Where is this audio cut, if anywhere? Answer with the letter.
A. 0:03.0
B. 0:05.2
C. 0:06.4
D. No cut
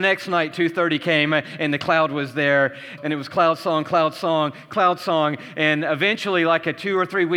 A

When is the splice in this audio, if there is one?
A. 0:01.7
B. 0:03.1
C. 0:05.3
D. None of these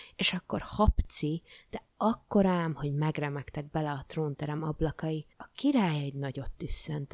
C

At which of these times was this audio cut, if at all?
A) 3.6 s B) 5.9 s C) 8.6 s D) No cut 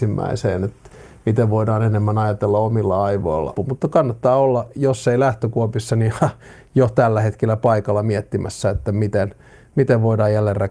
A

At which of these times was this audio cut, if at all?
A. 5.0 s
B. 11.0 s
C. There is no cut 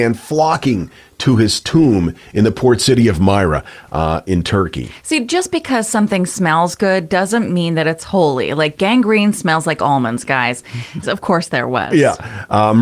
B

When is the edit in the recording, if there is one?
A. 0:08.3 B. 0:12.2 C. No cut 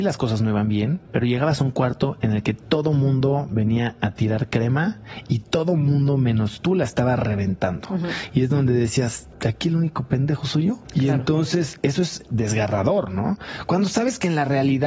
B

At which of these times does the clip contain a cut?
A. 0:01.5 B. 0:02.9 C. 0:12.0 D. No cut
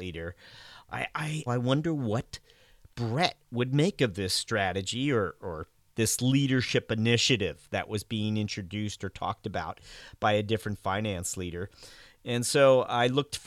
A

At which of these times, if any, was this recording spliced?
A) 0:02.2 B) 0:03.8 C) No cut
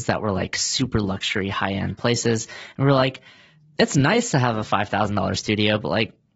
B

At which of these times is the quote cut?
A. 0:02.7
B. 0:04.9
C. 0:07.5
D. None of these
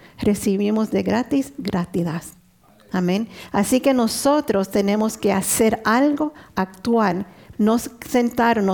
C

